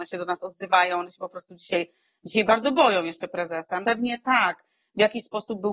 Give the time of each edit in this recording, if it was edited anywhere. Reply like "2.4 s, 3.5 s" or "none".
3.8 s